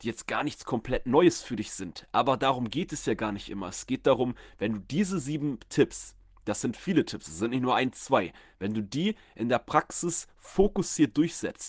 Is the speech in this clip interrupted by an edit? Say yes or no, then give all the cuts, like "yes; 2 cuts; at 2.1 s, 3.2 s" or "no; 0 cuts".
no; 0 cuts